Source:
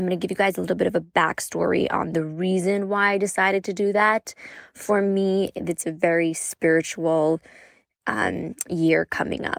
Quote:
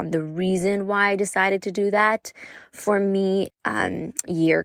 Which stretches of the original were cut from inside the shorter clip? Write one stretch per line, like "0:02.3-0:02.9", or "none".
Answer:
0:05.5-0:07.9